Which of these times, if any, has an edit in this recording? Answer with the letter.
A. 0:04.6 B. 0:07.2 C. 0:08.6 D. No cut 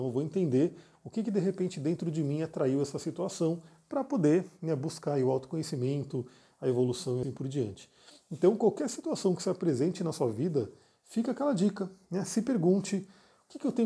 B